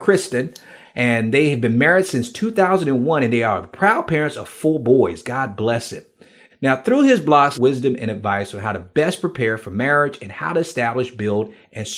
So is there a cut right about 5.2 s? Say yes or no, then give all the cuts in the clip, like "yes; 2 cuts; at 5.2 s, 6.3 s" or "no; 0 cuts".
no; 2 cuts; at 6.5 s, 7.5 s